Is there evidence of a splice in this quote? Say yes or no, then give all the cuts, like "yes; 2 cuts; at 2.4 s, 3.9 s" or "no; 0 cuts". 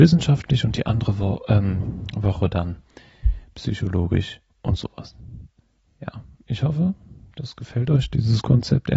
no; 0 cuts